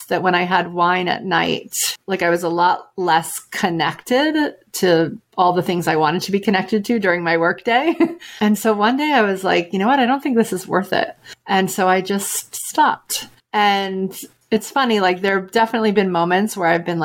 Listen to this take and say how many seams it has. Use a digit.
0